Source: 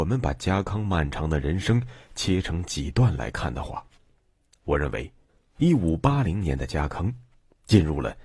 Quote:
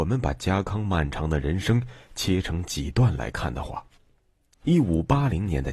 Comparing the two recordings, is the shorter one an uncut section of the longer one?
no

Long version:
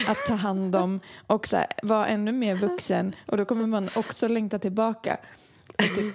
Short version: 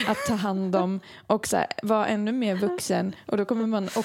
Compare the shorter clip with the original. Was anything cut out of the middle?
no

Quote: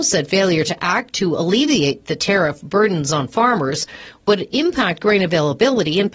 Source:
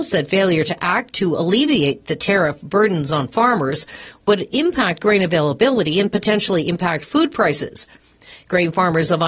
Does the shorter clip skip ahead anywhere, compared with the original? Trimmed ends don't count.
no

